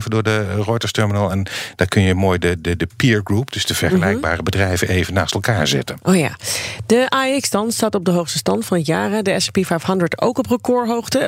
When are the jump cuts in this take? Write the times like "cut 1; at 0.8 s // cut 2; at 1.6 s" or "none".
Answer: none